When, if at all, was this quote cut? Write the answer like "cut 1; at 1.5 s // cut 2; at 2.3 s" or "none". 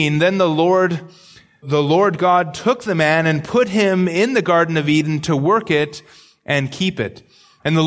cut 1; at 1.6 s